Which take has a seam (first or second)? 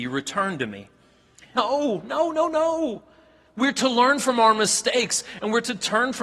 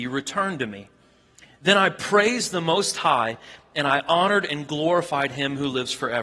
first